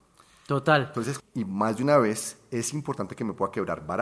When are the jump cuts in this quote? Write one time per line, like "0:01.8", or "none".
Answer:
0:01.2